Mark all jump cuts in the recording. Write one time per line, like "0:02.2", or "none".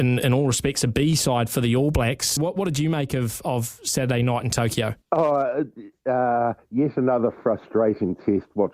0:02.4
0:05.0